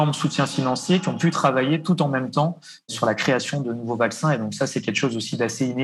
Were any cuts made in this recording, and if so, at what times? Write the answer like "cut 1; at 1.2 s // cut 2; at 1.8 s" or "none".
none